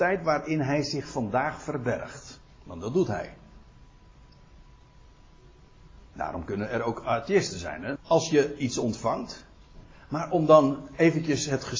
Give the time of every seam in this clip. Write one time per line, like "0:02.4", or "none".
0:08.0